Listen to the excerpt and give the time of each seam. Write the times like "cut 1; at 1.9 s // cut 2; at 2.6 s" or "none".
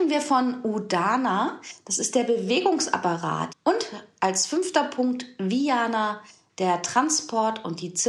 cut 1; at 3.5 s